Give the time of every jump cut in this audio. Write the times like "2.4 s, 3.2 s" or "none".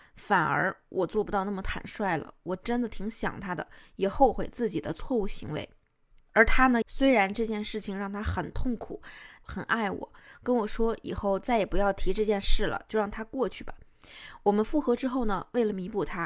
6.8 s, 9.4 s